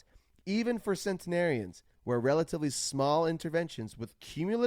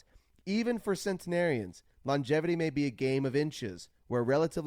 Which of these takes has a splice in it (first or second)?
first